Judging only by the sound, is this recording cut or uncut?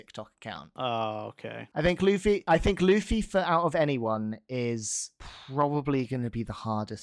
cut